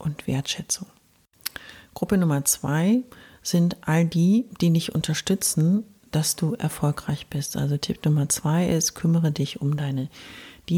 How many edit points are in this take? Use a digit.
0